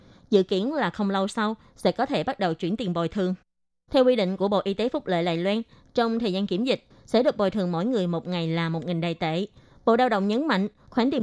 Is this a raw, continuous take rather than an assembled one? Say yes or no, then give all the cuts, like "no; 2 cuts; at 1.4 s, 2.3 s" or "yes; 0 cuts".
no; 2 cuts; at 3.7 s, 6.9 s